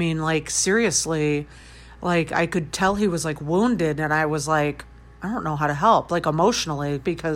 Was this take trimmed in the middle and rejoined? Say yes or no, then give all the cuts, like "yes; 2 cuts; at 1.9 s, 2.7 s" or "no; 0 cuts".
no; 0 cuts